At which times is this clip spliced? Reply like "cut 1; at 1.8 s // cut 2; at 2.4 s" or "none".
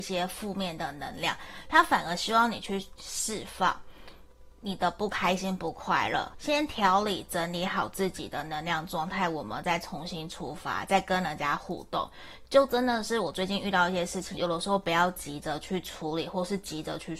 cut 1; at 6.3 s // cut 2; at 14.4 s